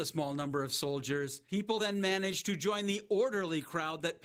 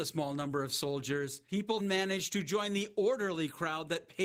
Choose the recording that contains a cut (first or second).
second